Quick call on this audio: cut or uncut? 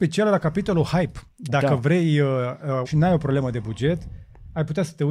cut